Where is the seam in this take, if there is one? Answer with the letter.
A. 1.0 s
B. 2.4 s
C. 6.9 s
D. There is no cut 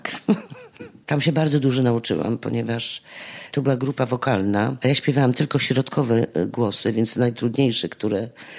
A